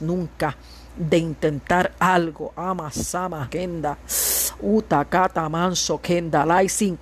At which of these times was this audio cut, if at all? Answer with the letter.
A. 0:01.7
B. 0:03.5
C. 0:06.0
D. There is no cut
B